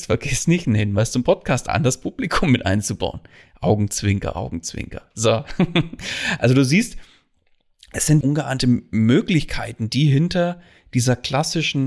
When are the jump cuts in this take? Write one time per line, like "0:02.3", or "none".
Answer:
0:08.2